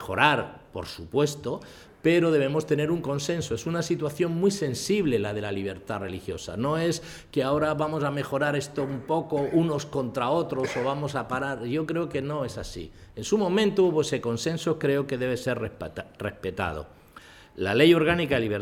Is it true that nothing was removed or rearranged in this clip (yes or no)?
yes